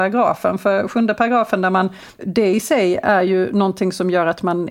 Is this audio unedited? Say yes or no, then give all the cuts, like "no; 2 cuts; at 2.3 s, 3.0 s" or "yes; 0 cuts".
no; 1 cut; at 2.2 s